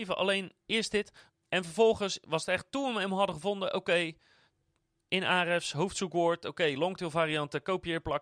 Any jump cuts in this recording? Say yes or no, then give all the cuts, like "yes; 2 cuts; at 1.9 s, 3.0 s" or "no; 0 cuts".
yes; 1 cut; at 1.3 s